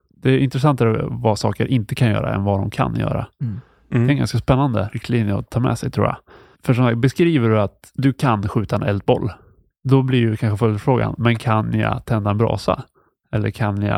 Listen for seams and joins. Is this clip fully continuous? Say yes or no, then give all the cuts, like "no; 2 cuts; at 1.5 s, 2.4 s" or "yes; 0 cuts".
yes; 0 cuts